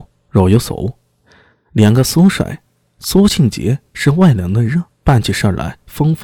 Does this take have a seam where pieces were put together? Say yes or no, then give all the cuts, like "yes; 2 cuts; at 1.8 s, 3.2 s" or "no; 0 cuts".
yes; 1 cut; at 5.0 s